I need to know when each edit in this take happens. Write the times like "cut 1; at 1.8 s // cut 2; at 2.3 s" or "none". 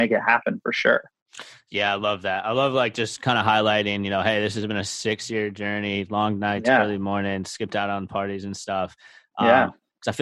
none